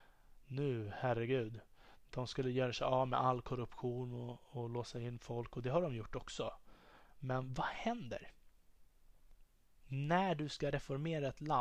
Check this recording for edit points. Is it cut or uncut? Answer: uncut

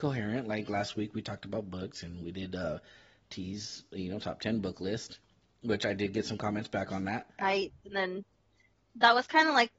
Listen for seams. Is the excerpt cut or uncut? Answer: cut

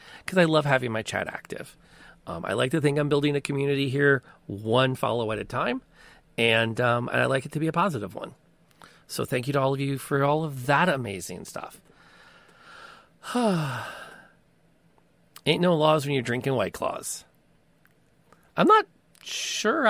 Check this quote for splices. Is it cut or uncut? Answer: uncut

